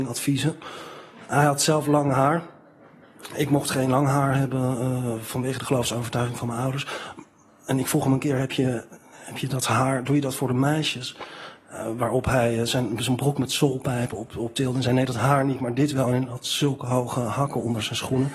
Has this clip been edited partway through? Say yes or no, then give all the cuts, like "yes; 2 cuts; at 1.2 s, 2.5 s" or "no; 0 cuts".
no; 0 cuts